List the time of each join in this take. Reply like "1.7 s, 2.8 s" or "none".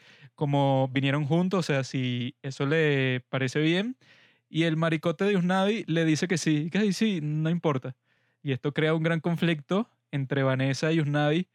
none